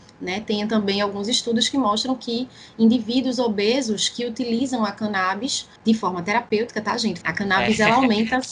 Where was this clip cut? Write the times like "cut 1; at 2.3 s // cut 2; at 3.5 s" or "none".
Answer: cut 1; at 5.8 s // cut 2; at 7.2 s